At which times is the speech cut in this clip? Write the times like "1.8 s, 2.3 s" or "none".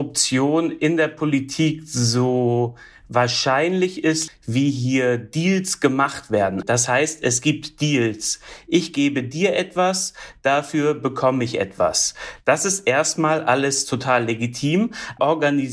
4.3 s, 6.6 s